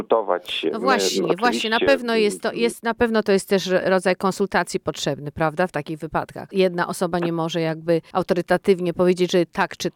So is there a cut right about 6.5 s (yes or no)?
no